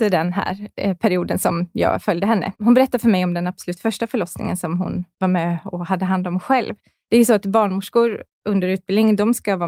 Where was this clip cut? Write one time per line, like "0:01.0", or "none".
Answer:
0:02.5
0:05.1